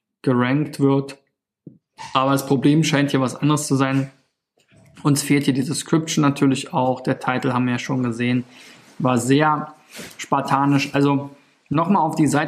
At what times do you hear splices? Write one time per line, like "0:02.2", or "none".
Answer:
none